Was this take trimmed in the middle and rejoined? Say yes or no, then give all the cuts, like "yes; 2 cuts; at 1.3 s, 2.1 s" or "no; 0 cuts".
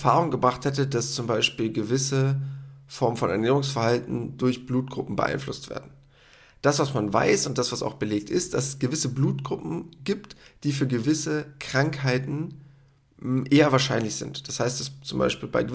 no; 0 cuts